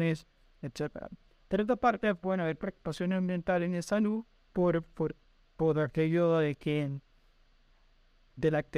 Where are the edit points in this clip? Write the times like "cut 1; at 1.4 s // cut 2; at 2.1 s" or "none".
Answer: none